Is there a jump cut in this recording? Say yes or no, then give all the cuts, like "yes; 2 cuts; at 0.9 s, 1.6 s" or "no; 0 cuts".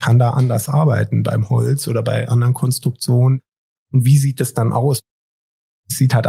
yes; 1 cut; at 3.8 s